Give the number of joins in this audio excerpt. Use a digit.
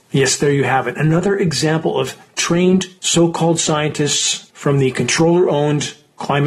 2